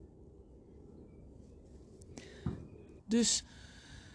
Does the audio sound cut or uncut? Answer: cut